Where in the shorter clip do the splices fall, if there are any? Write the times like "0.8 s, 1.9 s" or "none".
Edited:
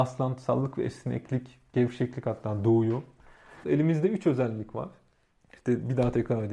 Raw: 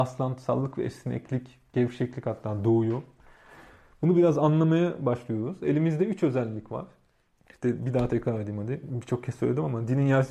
3.6 s